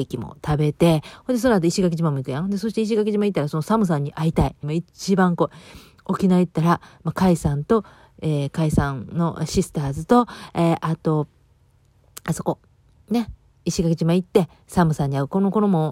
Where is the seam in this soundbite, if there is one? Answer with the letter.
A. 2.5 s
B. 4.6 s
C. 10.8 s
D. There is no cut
B